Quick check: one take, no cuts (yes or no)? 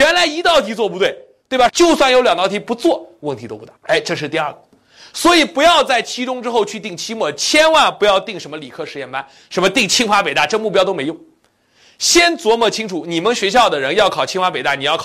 no